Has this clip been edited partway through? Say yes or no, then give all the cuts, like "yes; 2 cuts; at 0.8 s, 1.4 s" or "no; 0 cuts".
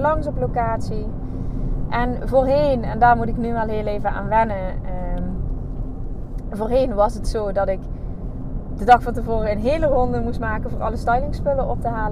no; 0 cuts